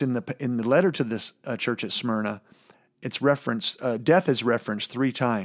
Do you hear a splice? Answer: no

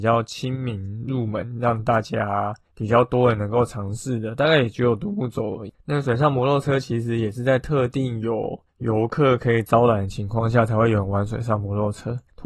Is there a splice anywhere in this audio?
yes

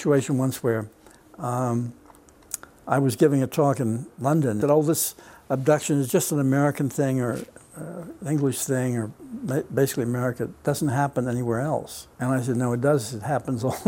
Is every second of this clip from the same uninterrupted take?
no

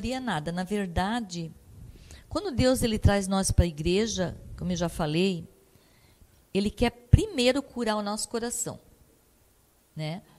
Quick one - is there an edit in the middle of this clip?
no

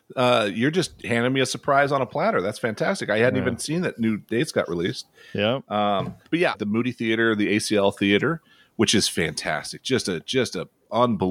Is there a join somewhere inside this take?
yes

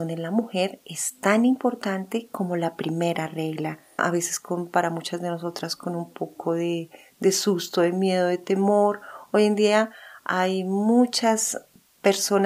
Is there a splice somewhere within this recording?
yes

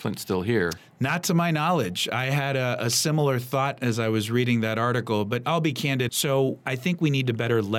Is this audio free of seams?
no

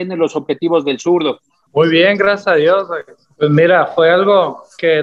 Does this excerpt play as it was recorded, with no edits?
no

